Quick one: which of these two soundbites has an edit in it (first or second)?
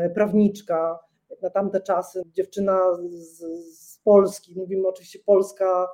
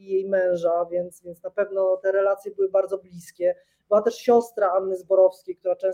first